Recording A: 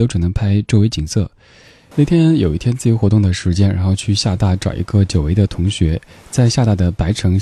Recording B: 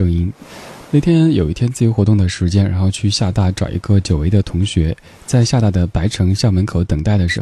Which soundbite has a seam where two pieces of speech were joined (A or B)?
A